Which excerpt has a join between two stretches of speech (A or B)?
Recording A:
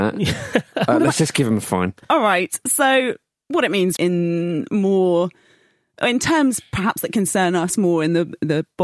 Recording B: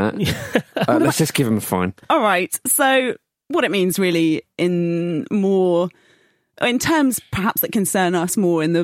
A